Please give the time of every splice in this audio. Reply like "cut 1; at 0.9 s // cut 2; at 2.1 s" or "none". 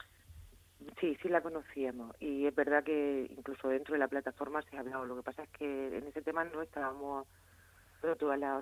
none